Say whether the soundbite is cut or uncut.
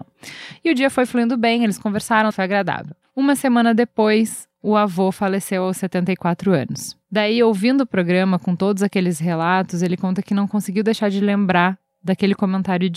cut